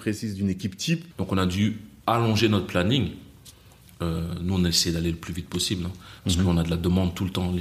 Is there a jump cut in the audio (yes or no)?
yes